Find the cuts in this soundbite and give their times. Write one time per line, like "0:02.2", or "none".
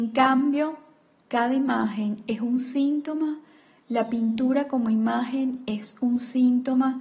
0:01.2